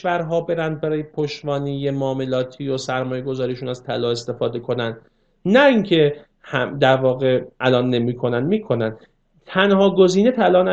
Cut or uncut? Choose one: uncut